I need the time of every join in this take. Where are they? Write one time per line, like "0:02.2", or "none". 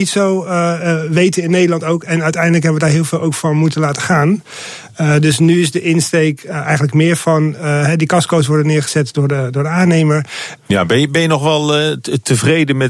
0:10.6